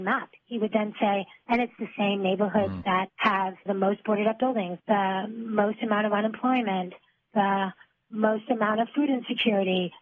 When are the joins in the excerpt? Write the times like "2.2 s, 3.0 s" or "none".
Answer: 4.8 s